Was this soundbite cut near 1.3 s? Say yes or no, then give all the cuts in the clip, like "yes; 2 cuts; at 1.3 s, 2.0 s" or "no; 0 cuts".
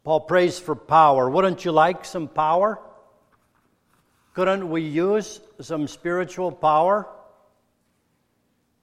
no; 0 cuts